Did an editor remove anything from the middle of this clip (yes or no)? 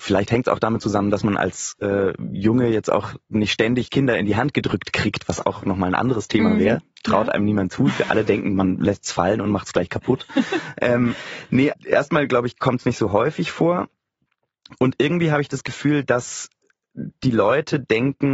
yes